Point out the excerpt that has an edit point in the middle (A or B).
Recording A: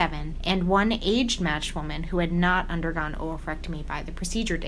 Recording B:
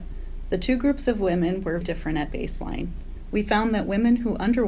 B